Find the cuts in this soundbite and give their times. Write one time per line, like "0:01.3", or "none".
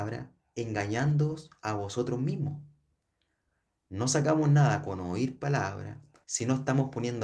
0:06.2